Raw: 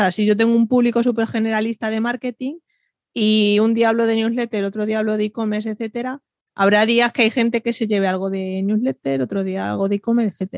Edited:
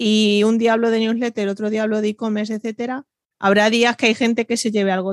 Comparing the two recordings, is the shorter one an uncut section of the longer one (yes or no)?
yes